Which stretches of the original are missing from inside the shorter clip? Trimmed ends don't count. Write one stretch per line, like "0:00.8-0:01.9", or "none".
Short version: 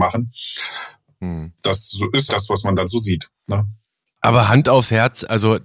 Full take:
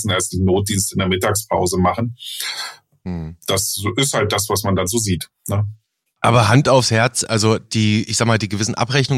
0:04.1-0:04.3